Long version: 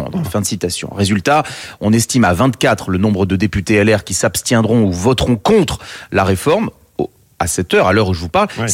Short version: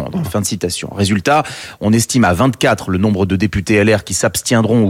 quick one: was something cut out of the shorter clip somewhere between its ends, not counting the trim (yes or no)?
no